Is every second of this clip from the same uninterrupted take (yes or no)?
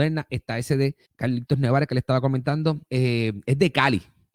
no